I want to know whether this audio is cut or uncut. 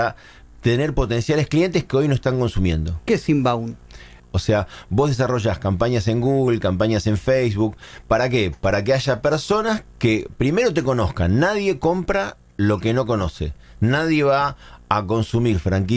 cut